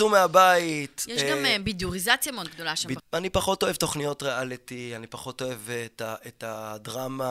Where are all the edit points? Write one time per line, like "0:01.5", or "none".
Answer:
0:03.0